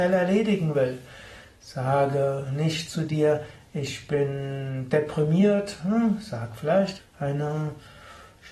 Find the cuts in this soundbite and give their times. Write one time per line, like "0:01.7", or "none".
0:07.0